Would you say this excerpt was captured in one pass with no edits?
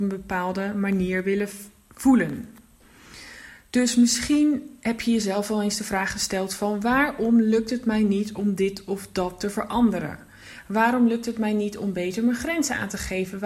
yes; 0 cuts

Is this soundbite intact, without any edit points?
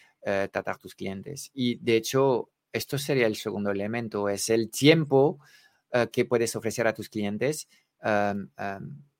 yes; 0 cuts

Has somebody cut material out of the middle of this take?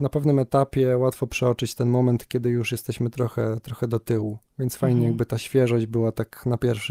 no; 0 cuts

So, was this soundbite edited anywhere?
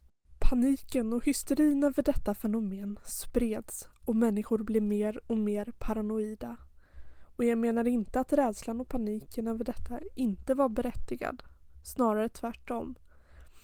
no; 0 cuts

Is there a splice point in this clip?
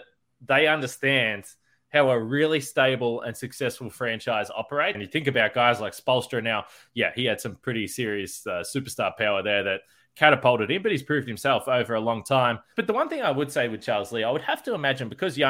yes; 2 cuts; at 4.9 s, 12.7 s

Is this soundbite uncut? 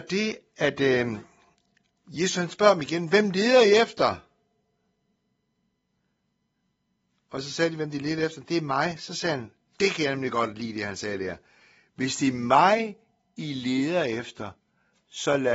yes; 0 cuts

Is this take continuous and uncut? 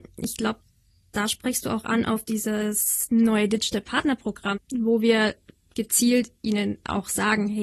no; 1 cut; at 4.5 s

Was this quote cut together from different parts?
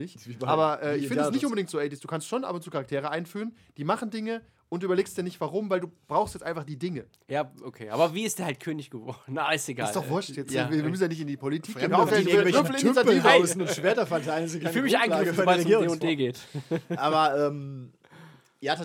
yes; 1 cut; at 12.1 s

